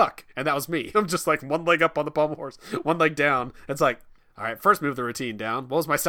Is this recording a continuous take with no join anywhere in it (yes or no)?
yes